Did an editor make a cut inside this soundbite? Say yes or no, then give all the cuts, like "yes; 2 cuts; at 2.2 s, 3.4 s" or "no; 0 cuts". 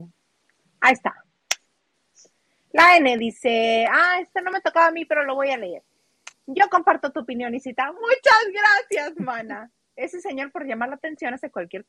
no; 0 cuts